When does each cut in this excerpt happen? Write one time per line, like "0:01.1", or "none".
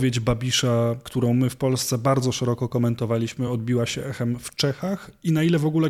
none